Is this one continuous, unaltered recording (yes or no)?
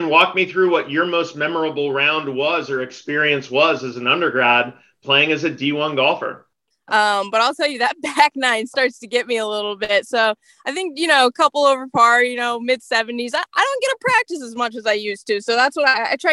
no